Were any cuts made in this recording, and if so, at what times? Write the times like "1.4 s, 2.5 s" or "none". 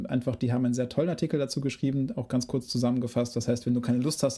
none